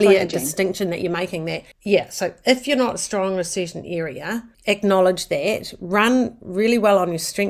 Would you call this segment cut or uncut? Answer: cut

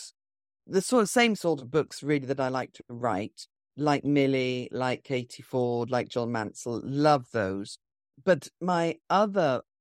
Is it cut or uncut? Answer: uncut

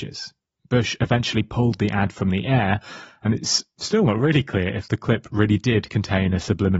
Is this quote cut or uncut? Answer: uncut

